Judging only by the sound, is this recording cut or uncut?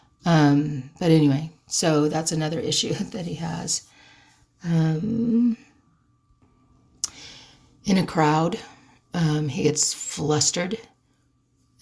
uncut